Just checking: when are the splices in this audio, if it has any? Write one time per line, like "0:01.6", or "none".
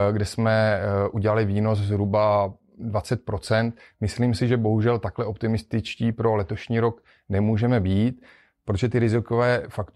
none